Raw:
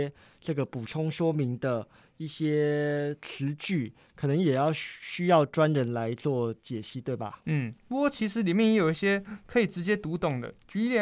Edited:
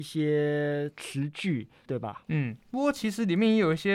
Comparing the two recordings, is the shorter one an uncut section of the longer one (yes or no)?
no